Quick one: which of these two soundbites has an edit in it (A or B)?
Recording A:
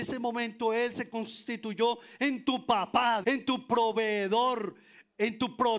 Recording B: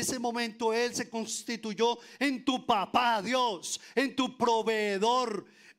A